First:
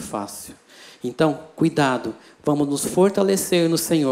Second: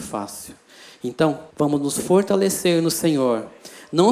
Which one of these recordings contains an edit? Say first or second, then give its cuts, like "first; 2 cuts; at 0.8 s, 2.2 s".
second; 1 cut; at 1.5 s